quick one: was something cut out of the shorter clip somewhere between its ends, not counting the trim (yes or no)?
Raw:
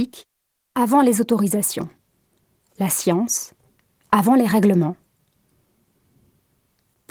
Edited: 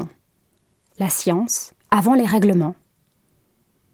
yes